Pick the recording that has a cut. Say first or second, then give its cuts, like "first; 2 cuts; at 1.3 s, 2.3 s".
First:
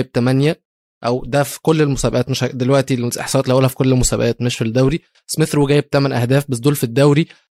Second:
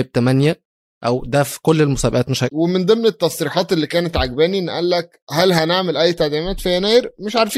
second; 1 cut; at 2.5 s